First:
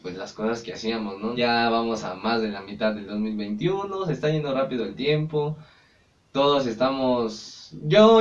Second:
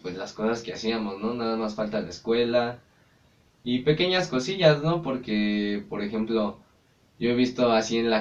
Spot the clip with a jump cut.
first; 1 cut; at 1.3 s

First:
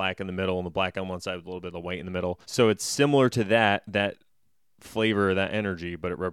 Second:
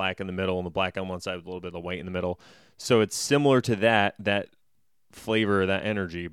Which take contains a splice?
first; 1 cut; at 2.4 s

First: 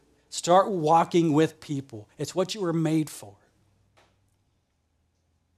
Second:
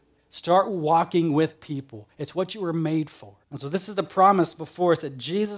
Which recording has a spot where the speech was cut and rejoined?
second; 1 cut; at 3.4 s

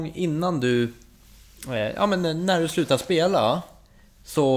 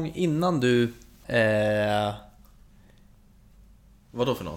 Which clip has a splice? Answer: second; 1 cut; at 1.2 s

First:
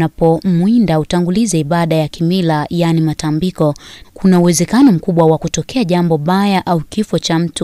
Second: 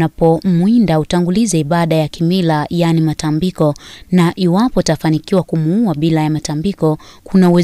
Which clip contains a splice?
first; 1 cut; at 4.0 s

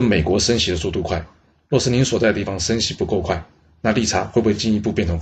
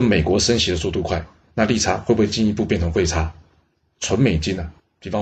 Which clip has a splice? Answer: second; 1 cut; at 1.5 s

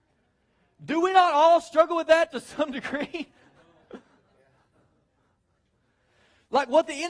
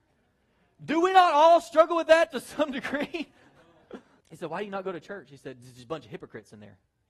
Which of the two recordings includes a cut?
second; 1 cut; at 4.2 s

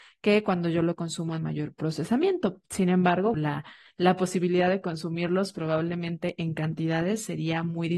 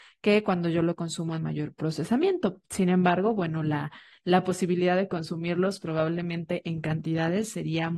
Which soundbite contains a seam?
first; 1 cut; at 3.3 s

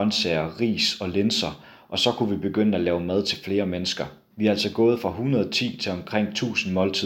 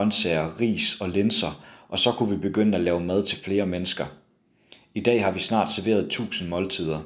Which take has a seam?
first; 1 cut; at 4.3 s

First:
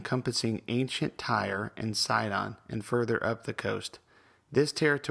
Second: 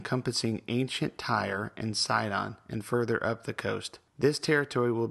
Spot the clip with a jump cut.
second; 1 cut; at 4.1 s

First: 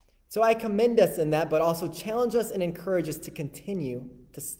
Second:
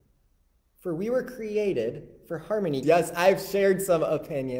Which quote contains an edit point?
second; 1 cut; at 2.8 s

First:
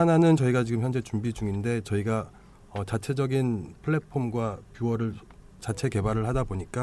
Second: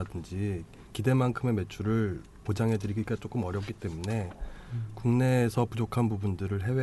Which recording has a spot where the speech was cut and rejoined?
first; 1 cut; at 5.5 s

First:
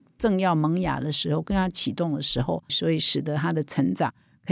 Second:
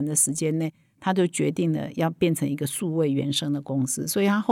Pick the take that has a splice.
first; 1 cut; at 2.7 s

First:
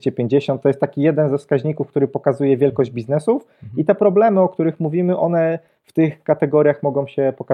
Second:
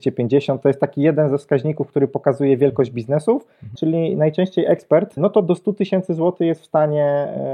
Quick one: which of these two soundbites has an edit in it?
second; 2 cuts; at 3.7 s, 5.2 s

